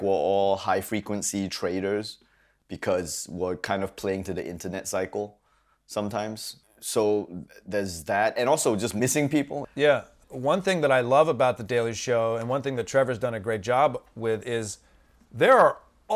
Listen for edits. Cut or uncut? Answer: uncut